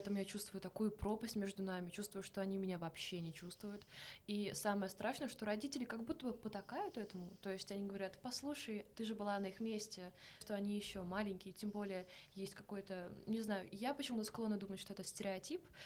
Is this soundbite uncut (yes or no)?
no